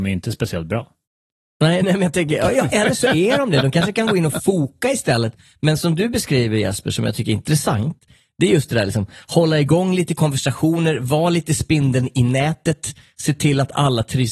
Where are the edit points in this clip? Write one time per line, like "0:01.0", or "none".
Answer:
0:01.8